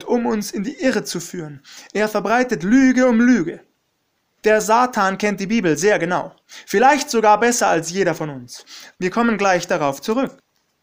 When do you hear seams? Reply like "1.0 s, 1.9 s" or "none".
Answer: 4.4 s, 8.9 s